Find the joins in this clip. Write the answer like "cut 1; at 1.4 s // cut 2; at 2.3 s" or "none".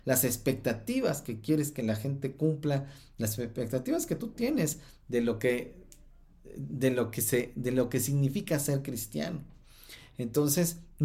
none